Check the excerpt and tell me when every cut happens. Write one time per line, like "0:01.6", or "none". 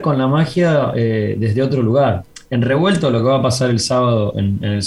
none